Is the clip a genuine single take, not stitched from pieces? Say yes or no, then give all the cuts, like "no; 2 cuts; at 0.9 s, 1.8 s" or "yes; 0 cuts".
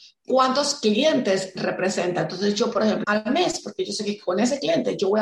no; 1 cut; at 3.0 s